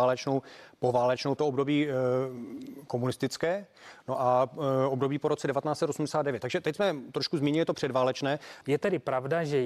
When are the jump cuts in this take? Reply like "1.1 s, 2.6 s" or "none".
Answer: 1.4 s, 8.6 s